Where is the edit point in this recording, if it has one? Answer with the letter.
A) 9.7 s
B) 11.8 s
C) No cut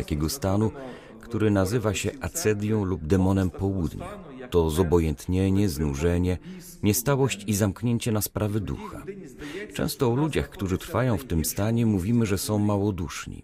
C